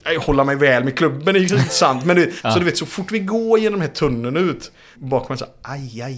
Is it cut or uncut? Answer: cut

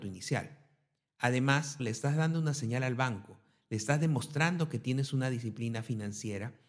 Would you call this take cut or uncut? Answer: cut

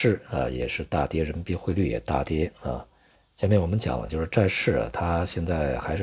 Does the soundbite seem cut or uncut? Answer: uncut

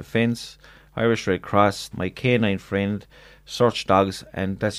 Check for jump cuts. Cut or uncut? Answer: cut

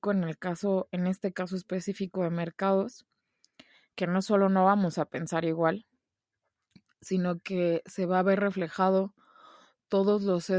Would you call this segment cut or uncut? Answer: uncut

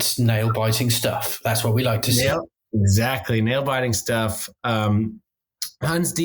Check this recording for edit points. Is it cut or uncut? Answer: uncut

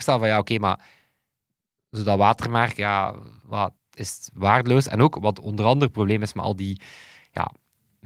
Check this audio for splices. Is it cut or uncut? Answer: cut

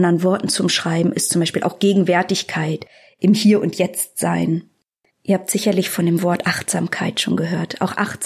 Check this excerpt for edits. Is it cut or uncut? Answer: cut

